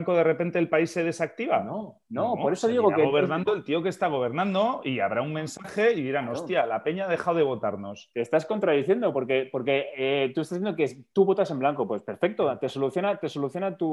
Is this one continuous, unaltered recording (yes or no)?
yes